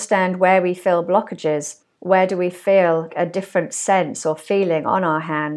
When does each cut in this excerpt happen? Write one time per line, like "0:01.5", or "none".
0:01.9
0:03.1

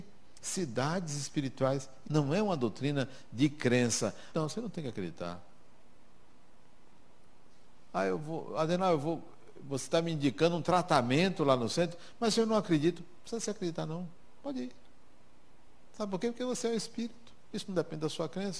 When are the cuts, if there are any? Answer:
0:02.0
0:04.3

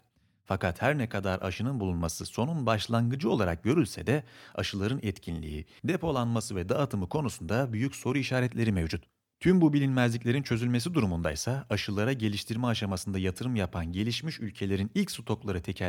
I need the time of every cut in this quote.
0:05.8

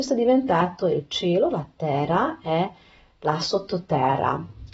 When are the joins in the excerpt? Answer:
none

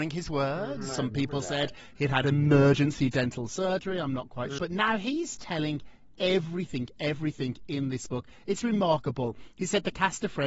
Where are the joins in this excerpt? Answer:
0:04.6

